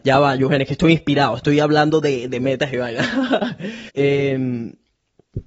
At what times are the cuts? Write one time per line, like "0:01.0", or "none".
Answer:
0:03.9